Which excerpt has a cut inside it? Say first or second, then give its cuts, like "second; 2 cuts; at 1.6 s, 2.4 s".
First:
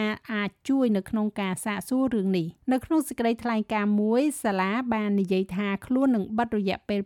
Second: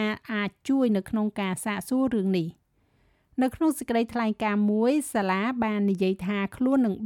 first; 1 cut; at 2.6 s